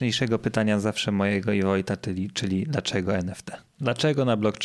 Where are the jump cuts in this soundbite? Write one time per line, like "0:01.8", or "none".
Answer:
none